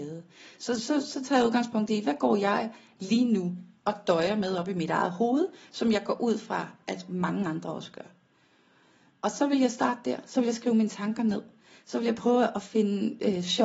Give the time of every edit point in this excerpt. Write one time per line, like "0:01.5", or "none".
none